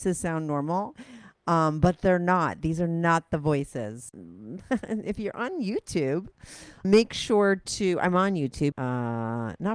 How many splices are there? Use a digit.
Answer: 3